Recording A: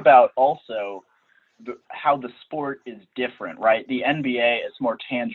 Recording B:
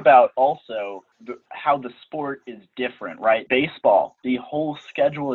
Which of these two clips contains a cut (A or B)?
B